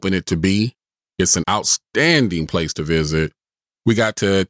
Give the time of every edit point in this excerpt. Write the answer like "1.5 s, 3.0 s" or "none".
none